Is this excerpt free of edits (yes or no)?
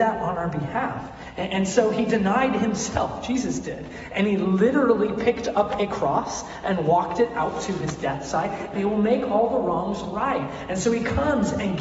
no